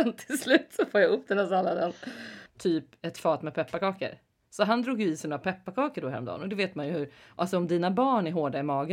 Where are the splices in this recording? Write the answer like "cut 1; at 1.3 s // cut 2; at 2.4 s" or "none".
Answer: cut 1; at 2.5 s